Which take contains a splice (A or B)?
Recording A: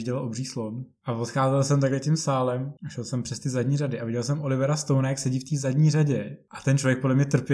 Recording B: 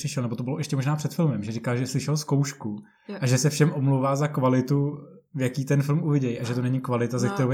A